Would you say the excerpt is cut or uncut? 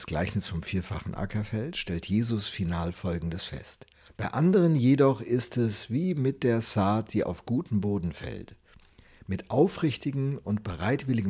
cut